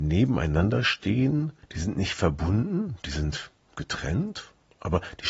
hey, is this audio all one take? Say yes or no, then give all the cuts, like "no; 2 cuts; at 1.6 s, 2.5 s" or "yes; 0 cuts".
yes; 0 cuts